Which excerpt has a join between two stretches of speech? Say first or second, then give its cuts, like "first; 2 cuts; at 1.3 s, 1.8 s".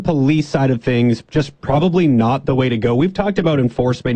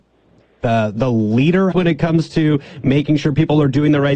second; 1 cut; at 1.7 s